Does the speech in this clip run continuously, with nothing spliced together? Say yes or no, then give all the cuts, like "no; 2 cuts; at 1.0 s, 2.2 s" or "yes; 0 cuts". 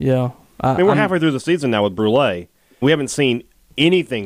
no; 1 cut; at 2.8 s